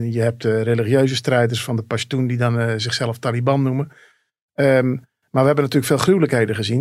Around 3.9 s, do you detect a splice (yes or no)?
no